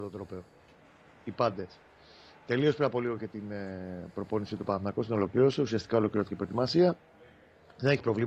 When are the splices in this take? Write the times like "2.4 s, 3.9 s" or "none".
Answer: none